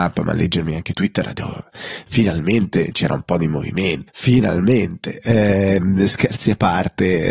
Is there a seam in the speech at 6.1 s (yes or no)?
no